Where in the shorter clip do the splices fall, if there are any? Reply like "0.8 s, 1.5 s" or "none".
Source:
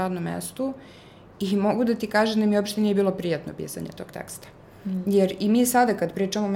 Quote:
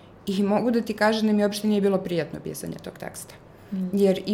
none